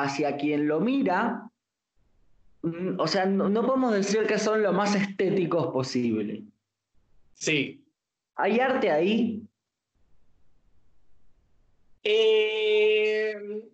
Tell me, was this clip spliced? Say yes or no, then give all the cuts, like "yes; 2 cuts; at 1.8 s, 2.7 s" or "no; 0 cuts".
no; 0 cuts